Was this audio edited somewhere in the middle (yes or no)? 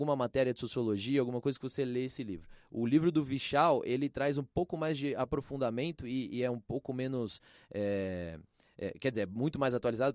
no